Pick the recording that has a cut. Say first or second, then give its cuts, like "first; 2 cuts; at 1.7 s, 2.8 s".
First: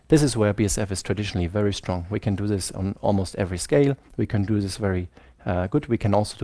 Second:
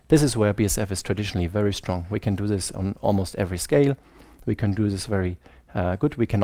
first; 1 cut; at 4.1 s